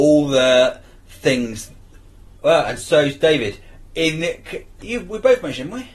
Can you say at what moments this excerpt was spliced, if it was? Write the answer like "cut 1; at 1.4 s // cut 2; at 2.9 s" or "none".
cut 1; at 2.4 s // cut 2; at 4.8 s